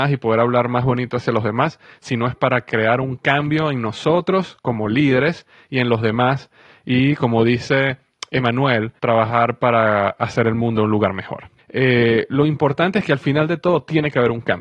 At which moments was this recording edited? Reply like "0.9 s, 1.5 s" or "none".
9.0 s, 11.6 s